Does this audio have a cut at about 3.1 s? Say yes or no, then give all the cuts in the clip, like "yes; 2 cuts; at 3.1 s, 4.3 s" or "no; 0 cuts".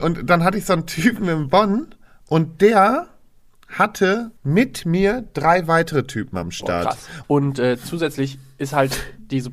no; 2 cuts; at 4.4 s, 7.2 s